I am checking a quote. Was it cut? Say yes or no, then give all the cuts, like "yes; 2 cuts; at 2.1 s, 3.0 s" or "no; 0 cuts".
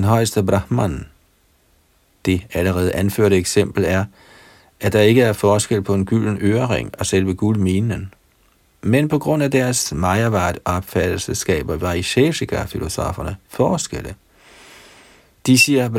no; 0 cuts